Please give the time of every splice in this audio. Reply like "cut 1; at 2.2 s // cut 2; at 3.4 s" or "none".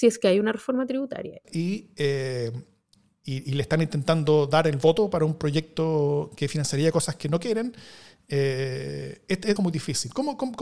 cut 1; at 1.4 s // cut 2; at 9.6 s